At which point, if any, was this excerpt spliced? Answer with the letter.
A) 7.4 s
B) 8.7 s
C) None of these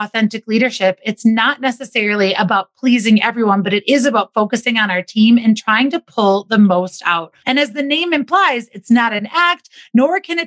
A